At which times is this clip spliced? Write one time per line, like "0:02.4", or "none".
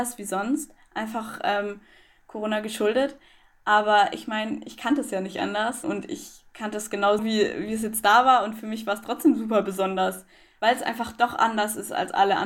0:05.8
0:07.2